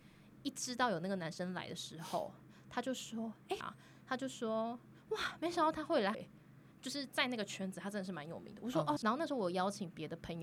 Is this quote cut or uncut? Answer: cut